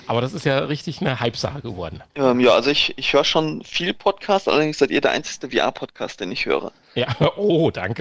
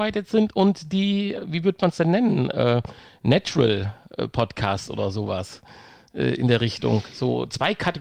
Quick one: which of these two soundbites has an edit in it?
first; 1 cut; at 2.1 s

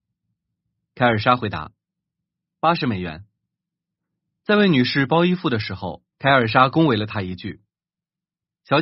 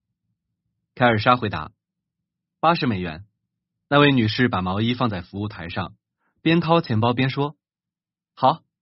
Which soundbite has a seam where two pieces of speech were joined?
first; 2 cuts; at 3.6 s, 6.1 s

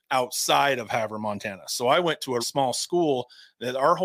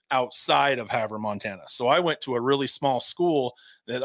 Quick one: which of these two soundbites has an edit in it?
first; 1 cut; at 2.4 s

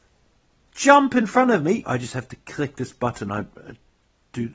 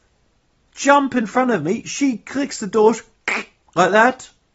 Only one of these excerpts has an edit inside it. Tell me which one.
first; 1 cut; at 1.8 s

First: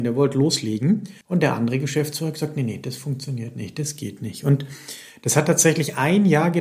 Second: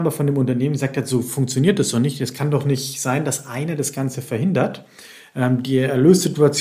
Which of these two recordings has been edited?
first; 1 cut; at 1.2 s

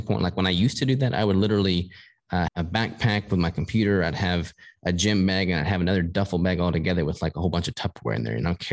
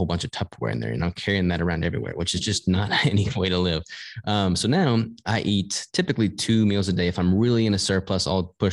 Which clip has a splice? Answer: first; 1 cut; at 2.5 s

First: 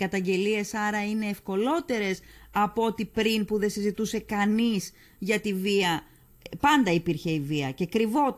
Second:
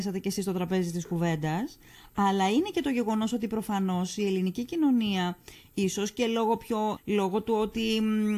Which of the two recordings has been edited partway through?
second; 1 cut; at 7.0 s

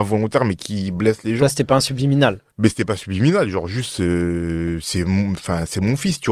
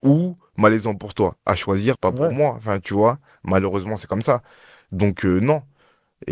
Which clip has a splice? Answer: second; 1 cut; at 2.0 s

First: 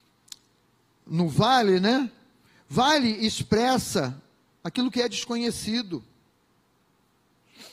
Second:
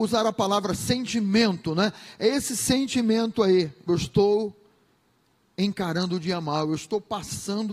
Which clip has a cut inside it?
second; 1 cut; at 3.9 s

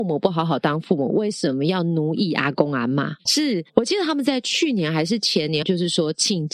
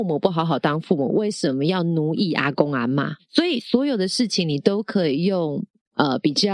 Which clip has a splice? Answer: first; 2 cuts; at 3.3 s, 5.6 s

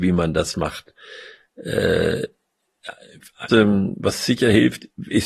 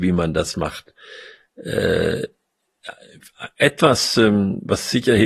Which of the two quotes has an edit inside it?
first; 1 cut; at 3.5 s

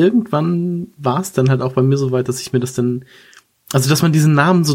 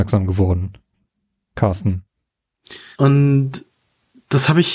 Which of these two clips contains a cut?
second; 1 cut; at 2.9 s

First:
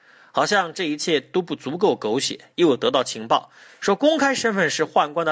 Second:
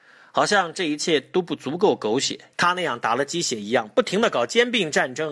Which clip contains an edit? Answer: second; 1 cut; at 2.5 s

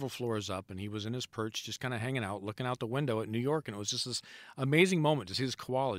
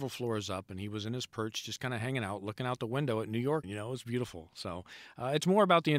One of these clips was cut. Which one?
second; 1 cut; at 3.6 s

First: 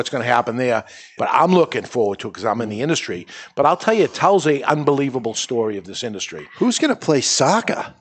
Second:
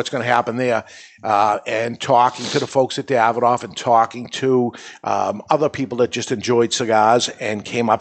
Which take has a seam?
first; 1 cut; at 1.2 s

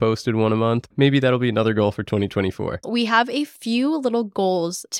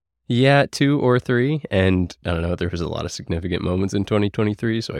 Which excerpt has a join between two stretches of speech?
first; 2 cuts; at 0.9 s, 2.8 s

